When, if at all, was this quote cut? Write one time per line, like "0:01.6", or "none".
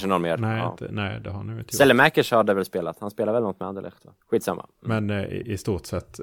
0:04.2